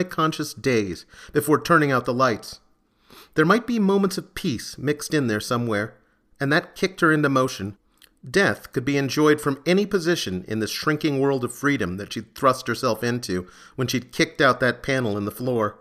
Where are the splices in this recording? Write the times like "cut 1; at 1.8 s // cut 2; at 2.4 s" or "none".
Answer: none